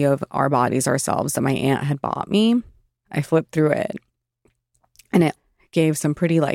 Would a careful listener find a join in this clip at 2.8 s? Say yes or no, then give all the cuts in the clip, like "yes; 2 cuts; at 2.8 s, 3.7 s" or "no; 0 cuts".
no; 0 cuts